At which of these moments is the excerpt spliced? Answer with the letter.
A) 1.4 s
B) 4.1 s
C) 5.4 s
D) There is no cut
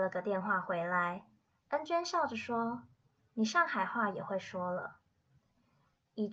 C